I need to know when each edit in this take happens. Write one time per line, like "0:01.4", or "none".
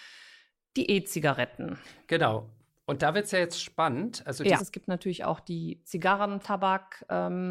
0:04.6
0:06.4